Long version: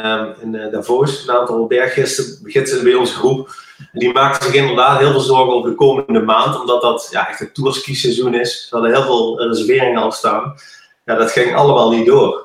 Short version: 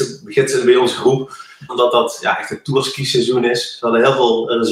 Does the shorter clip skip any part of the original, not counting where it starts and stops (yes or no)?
yes